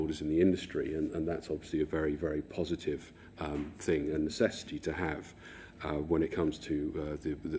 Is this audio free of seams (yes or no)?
yes